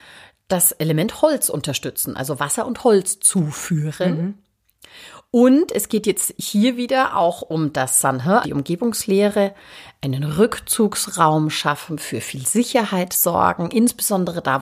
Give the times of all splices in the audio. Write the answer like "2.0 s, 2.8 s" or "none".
8.4 s